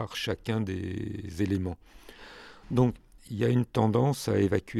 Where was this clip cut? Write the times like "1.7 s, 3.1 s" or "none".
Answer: 3.3 s